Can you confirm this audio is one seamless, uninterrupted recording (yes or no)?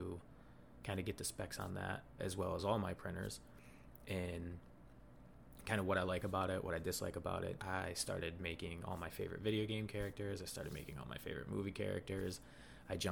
no